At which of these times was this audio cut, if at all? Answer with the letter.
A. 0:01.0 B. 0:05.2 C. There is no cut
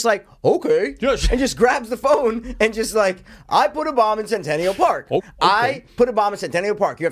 B